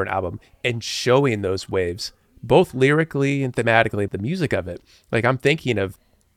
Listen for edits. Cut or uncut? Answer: cut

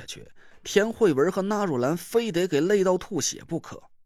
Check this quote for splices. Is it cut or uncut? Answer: uncut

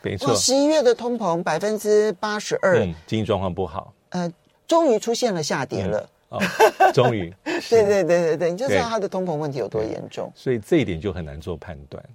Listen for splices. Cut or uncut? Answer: uncut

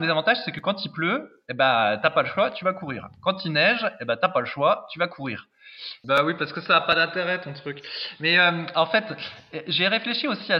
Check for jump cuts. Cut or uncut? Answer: cut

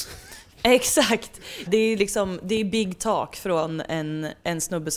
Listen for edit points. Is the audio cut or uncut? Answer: cut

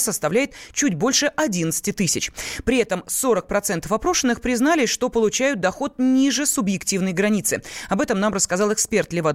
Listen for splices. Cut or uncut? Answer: uncut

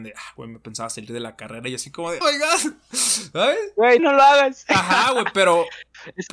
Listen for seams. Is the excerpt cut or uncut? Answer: cut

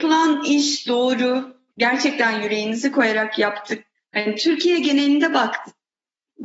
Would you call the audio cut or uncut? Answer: cut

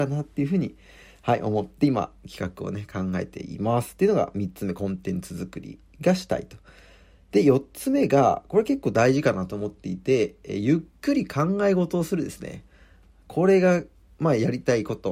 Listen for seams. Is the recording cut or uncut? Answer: uncut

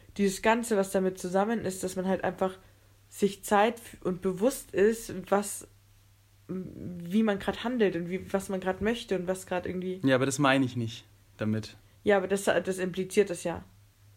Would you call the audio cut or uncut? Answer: uncut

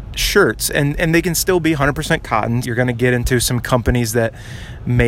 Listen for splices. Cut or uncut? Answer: cut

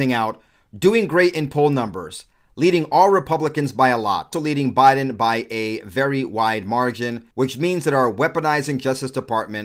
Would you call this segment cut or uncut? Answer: cut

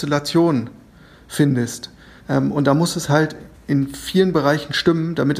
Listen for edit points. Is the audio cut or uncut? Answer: cut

